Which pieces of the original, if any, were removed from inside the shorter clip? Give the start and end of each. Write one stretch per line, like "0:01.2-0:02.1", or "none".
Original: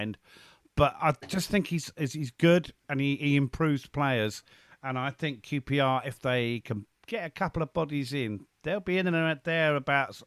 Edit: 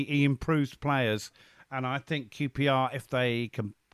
none